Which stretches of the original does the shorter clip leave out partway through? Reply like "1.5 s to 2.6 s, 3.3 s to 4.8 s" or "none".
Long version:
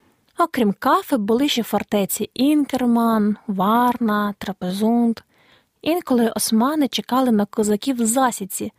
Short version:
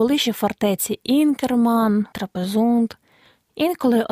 3.4 s to 4.4 s